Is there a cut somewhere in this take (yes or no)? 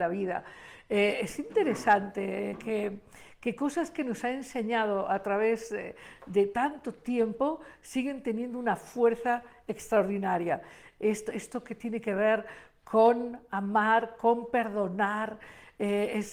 no